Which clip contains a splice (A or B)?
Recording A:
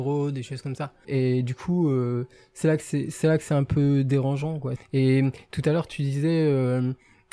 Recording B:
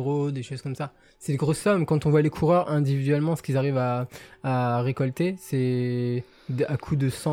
A